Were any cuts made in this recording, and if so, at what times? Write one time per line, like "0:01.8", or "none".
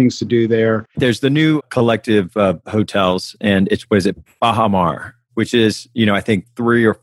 0:00.9